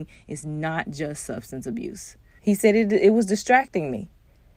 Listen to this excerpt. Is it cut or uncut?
cut